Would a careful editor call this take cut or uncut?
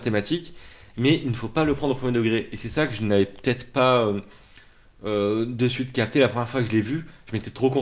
uncut